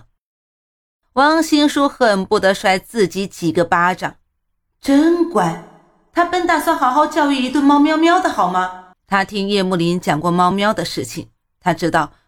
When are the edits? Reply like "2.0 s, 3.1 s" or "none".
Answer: 8.9 s, 10.5 s